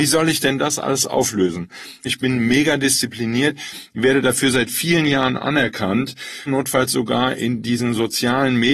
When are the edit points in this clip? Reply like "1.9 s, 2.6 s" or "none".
2.0 s, 6.5 s